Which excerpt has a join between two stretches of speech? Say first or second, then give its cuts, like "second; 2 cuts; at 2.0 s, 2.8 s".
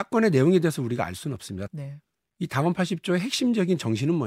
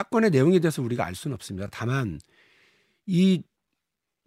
first; 1 cut; at 1.7 s